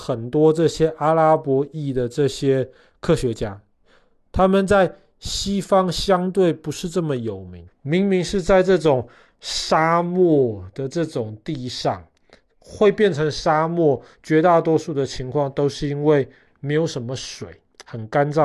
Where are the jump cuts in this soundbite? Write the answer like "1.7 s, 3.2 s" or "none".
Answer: 7.7 s

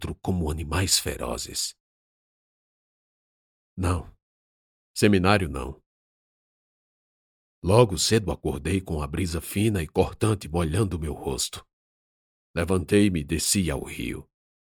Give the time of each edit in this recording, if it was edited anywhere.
none

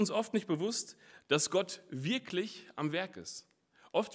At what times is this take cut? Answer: none

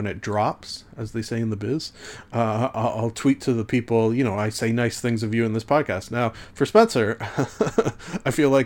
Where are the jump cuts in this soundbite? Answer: none

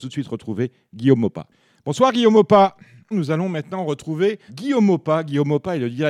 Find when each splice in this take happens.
3.1 s, 4.5 s

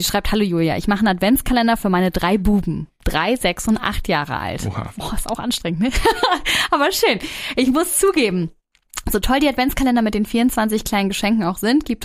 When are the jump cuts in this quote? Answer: none

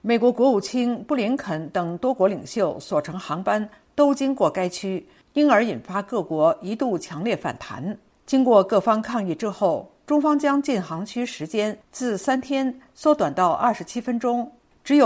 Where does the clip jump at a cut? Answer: none

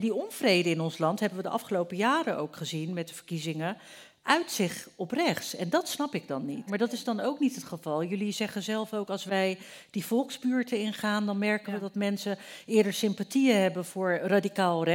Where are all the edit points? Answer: 6.7 s

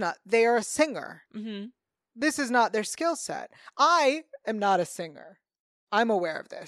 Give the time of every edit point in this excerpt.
none

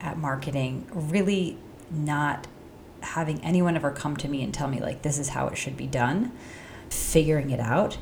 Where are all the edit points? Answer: 6.9 s

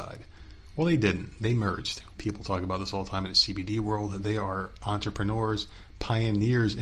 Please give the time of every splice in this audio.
2.2 s

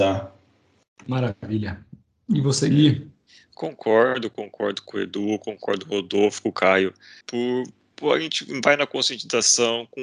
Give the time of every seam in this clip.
7.2 s

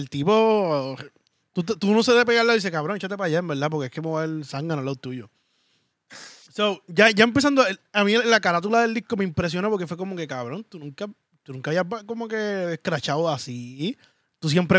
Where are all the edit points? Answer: none

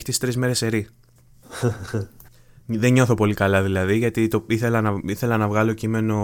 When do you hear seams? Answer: none

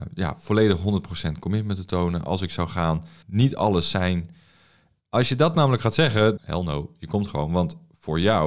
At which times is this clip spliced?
3.2 s, 5.0 s, 6.4 s

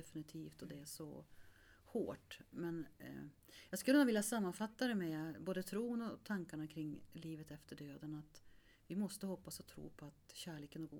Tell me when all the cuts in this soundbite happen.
none

